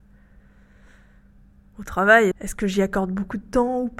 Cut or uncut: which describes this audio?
cut